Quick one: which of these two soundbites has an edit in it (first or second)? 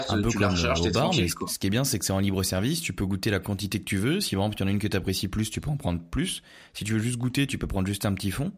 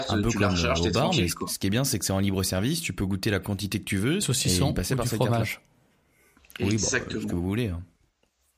second